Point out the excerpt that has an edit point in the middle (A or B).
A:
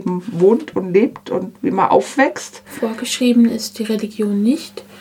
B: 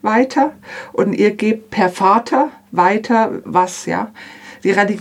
B